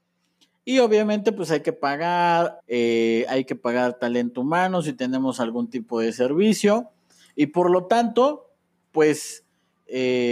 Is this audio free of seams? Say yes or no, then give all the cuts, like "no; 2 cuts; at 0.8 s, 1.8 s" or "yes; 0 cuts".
no; 1 cut; at 2.6 s